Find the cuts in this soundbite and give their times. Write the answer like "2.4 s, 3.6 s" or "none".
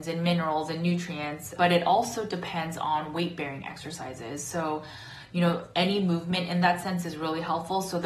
1.6 s